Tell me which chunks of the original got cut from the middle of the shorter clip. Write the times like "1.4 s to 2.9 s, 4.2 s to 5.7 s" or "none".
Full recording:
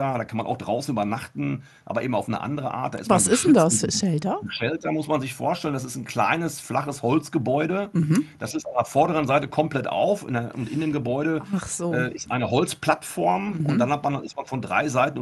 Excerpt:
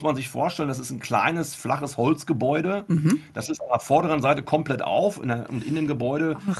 none